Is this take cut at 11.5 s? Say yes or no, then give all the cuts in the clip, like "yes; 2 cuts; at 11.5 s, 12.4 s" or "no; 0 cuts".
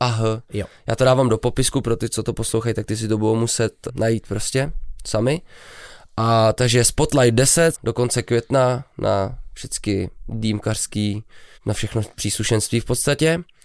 yes; 3 cuts; at 3.9 s, 7.7 s, 11.5 s